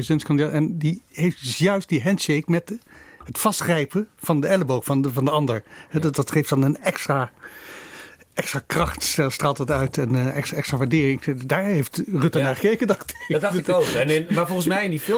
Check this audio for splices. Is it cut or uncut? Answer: uncut